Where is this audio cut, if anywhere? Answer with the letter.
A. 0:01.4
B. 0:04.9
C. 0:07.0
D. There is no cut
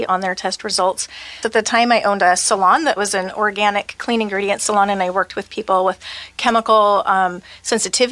A